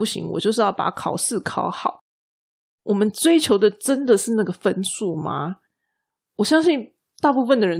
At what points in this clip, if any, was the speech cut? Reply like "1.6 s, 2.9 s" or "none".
none